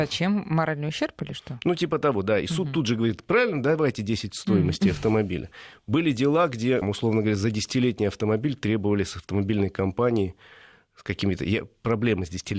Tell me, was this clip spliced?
yes; 1 cut; at 6.8 s

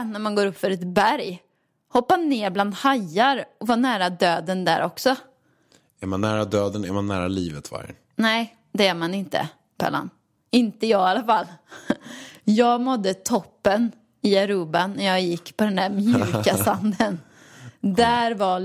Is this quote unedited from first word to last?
yes; 0 cuts

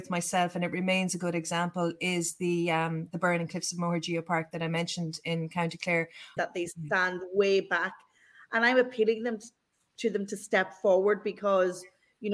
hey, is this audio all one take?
no; 1 cut; at 6.4 s

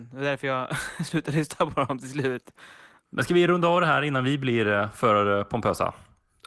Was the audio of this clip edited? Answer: no; 0 cuts

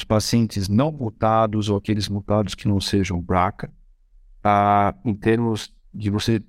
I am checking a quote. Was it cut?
no; 0 cuts

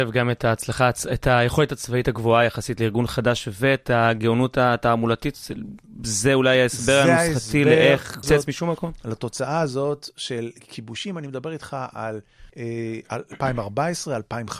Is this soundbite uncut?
no; 2 cuts; at 8.2 s, 12.5 s

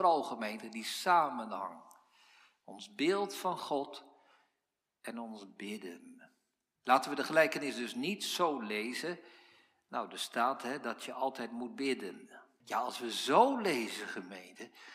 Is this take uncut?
no; 2 cuts; at 6.8 s, 12.6 s

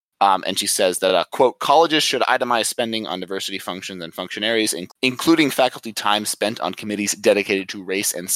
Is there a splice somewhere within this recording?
no; 0 cuts

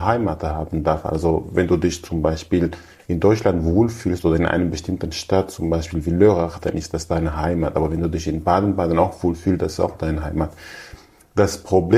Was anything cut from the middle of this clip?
no; 0 cuts

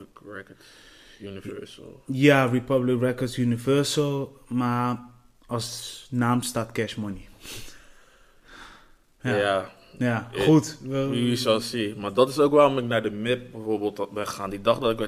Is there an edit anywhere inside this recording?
no; 0 cuts

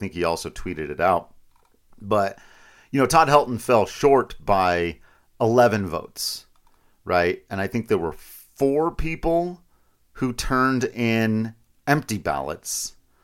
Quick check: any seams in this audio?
no; 0 cuts

